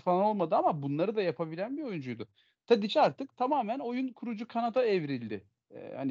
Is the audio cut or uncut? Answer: uncut